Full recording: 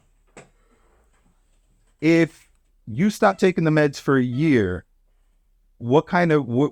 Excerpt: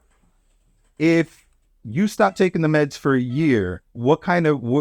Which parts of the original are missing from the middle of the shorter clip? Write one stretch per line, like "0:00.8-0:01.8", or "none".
0:04.9-0:05.7